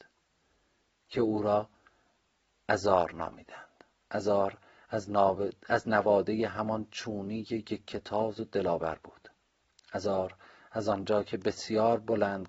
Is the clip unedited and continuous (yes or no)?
yes